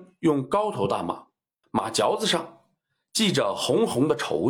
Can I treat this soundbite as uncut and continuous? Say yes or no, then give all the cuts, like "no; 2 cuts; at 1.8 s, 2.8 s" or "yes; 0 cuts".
no; 1 cut; at 1.6 s